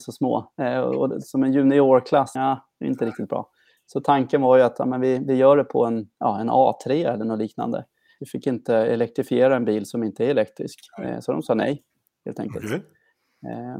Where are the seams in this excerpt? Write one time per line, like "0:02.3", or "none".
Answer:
0:02.4
0:08.2